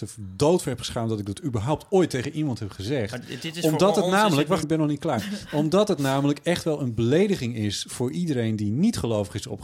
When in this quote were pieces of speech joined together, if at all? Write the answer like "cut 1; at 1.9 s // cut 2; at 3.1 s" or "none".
cut 1; at 4.6 s